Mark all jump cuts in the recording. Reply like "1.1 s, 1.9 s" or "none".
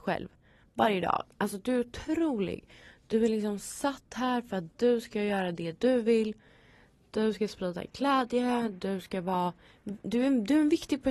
none

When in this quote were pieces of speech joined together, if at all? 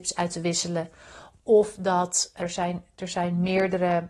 2.4 s

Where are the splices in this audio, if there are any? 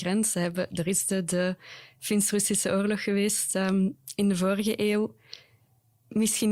none

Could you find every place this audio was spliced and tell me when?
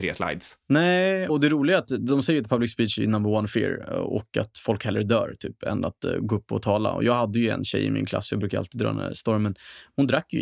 1.3 s

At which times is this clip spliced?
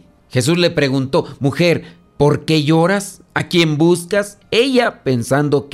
none

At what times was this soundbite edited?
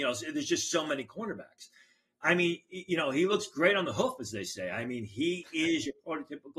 none

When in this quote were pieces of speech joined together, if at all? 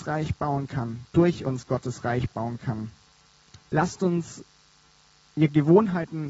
3.6 s

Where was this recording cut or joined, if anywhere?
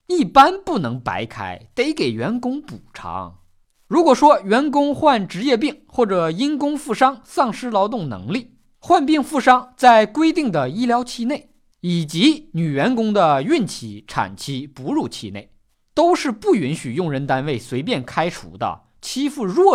none

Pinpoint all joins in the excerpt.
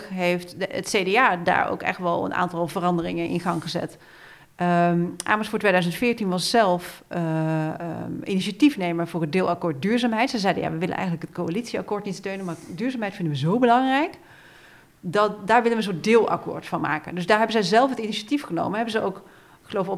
none

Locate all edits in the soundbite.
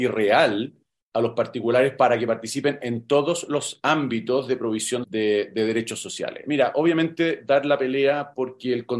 5.0 s, 6.4 s

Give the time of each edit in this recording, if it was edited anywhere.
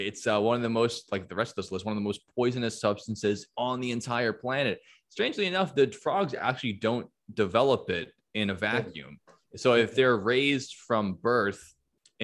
none

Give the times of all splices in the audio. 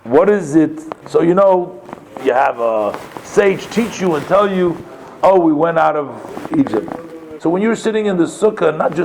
1.0 s, 2.2 s, 7.4 s

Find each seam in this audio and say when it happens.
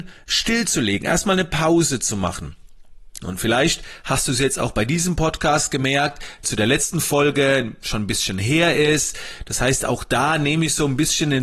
3.2 s, 6.4 s

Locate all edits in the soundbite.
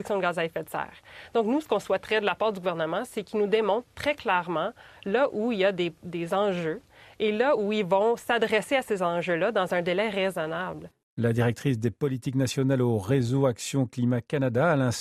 none

